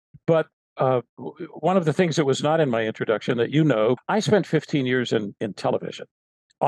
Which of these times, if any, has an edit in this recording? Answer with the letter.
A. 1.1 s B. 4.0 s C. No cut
B